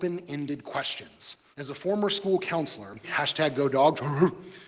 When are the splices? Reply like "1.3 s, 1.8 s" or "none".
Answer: 1.5 s, 3.0 s

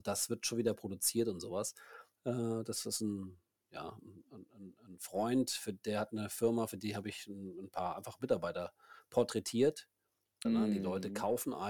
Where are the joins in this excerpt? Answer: 2.2 s, 10.4 s

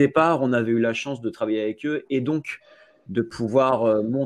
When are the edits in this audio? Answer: none

